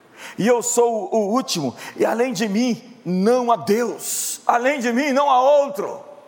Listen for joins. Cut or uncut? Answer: uncut